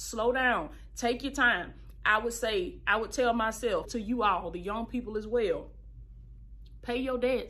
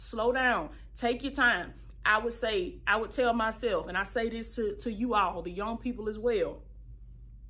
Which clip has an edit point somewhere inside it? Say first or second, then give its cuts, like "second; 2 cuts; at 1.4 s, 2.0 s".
first; 1 cut; at 3.8 s